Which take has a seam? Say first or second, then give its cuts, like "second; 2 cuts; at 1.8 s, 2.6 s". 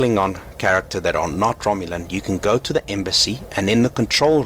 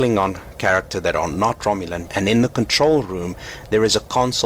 second; 1 cut; at 2.1 s